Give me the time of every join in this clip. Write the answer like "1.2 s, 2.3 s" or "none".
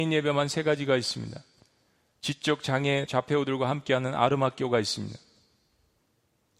3.1 s